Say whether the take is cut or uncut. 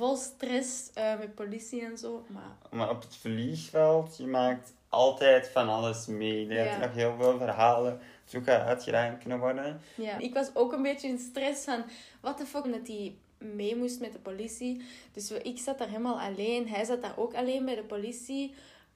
cut